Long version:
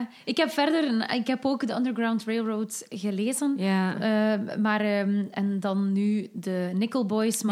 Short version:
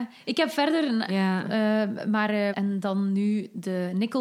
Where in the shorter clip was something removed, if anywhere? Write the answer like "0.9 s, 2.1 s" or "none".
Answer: 1.1 s, 2.5 s